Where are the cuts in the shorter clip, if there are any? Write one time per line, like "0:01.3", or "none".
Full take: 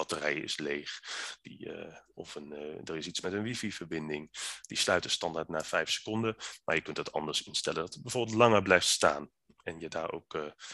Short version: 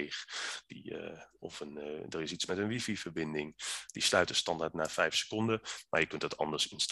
none